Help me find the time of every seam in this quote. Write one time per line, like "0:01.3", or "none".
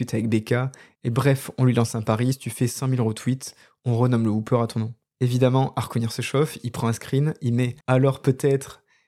0:05.1
0:07.8